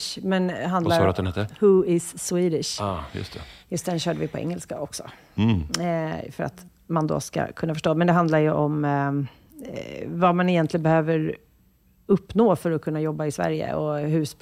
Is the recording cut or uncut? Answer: uncut